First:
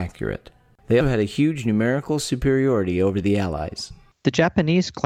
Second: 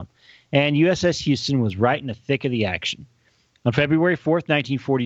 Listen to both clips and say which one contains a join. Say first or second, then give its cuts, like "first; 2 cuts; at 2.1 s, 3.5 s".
first; 2 cuts; at 1.0 s, 4.1 s